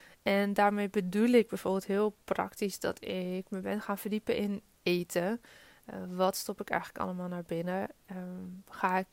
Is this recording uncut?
yes; 0 cuts

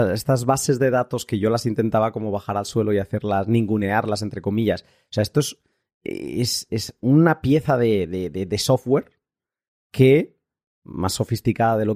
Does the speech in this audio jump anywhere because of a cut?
no; 0 cuts

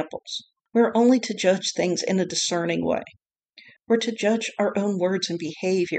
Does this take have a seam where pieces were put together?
yes; 1 cut; at 3.8 s

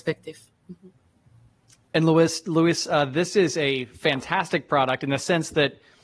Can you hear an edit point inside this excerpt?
no; 0 cuts

